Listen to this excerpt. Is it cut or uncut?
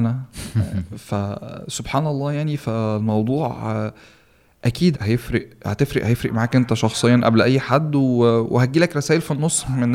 cut